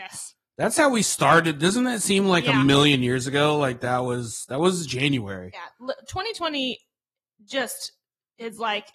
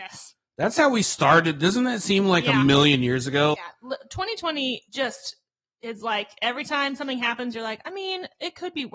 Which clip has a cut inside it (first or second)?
second